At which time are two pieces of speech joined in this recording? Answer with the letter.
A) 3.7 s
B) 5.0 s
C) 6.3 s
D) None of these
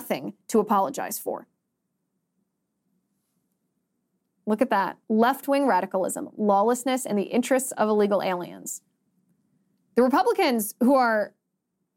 B